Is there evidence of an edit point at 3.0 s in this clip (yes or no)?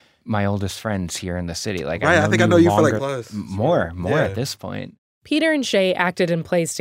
yes